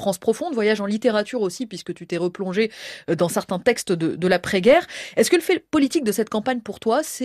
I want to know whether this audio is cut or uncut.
uncut